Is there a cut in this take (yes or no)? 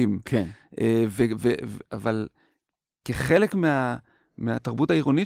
no